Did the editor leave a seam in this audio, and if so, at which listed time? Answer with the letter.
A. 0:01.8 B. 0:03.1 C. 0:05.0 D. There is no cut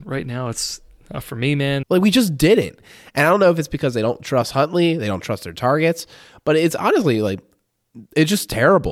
A